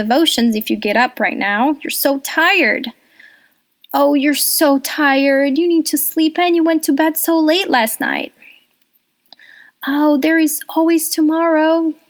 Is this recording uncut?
yes; 0 cuts

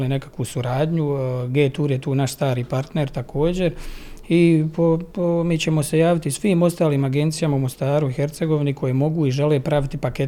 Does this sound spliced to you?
no; 0 cuts

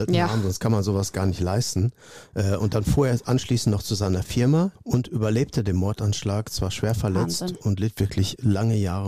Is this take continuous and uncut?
no; 1 cut; at 4.8 s

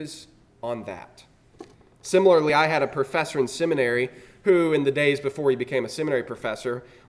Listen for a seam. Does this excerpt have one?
no; 0 cuts

